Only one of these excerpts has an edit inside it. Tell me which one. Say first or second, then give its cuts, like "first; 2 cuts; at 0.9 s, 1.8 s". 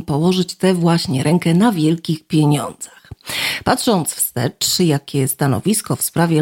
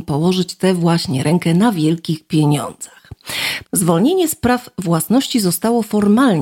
second; 1 cut; at 3.6 s